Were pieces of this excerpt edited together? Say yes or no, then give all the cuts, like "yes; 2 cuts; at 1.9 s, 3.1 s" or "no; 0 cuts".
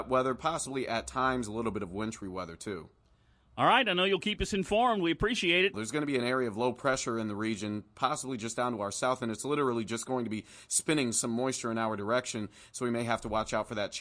yes; 1 cut; at 5.7 s